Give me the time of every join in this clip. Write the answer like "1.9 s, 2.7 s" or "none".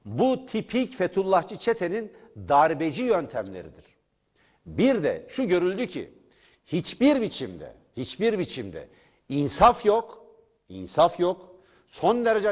none